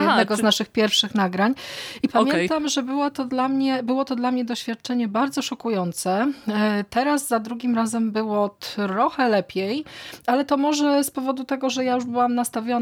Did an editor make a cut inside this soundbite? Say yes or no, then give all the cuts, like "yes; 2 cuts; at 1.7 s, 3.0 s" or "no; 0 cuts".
no; 0 cuts